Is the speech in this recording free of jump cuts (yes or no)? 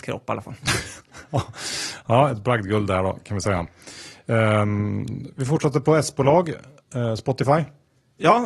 yes